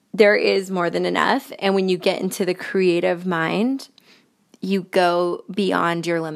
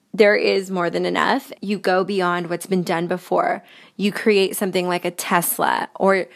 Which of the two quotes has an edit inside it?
second; 1 cut; at 1.5 s

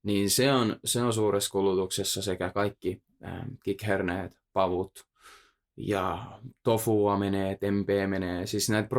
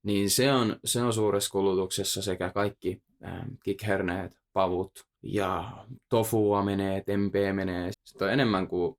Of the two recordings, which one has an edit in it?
second; 2 cuts; at 5.1 s, 7.9 s

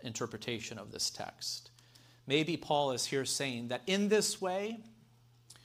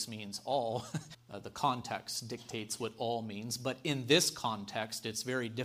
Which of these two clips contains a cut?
second; 1 cut; at 1.1 s

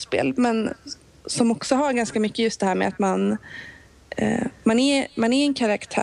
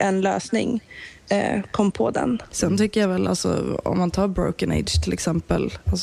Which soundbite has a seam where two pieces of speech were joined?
second; 1 cut; at 2.5 s

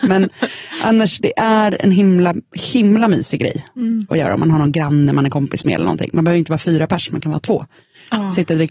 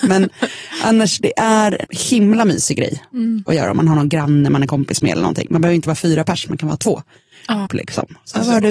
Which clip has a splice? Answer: second; 2 cuts; at 1.8 s, 7.7 s

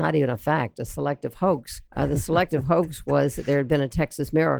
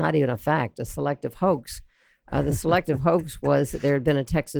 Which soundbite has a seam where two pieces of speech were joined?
first; 1 cut; at 1.9 s

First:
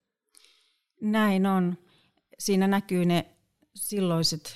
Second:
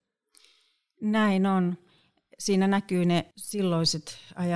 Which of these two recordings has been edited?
second; 1 cut; at 3.3 s

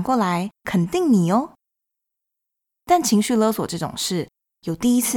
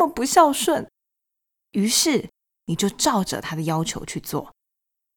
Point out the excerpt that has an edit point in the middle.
second; 1 cut; at 1.5 s

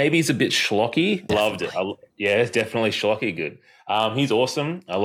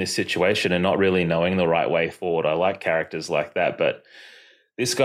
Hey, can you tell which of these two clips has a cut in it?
first; 1 cut; at 1.3 s

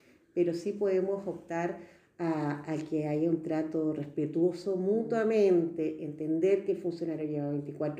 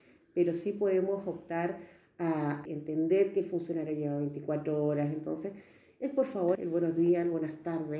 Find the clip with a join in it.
second; 2 cuts; at 2.7 s, 6.6 s

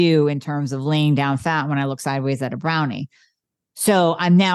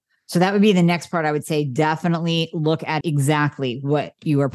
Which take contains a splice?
second; 1 cut; at 3.0 s

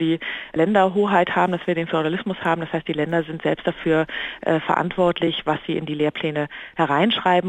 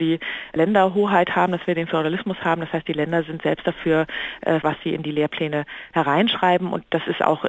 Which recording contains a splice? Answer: second; 1 cut; at 4.6 s

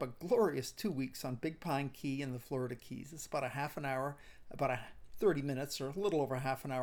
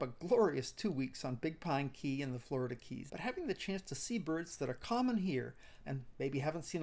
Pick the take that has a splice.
second; 2 cuts; at 3.1 s, 5.8 s

